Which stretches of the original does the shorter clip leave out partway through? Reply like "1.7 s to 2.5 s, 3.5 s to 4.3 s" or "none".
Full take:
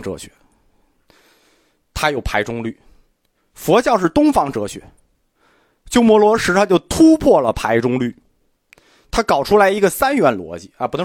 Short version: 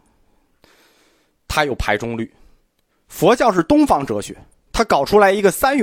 5.1 s to 9.1 s